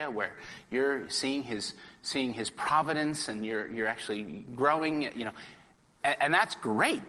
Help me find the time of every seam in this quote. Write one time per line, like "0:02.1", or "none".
none